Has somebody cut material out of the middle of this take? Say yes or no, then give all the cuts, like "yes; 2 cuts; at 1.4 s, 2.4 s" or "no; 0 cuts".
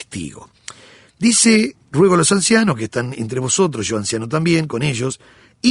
no; 0 cuts